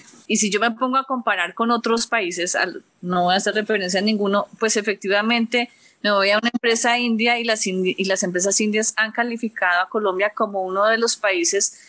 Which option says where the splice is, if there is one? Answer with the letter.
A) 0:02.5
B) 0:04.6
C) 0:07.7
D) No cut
D